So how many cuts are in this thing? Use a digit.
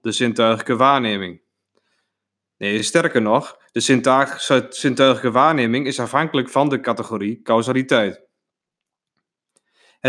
0